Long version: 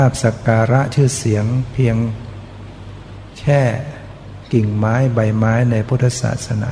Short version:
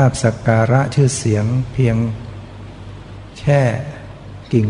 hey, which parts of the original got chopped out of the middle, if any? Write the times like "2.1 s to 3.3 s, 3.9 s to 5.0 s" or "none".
none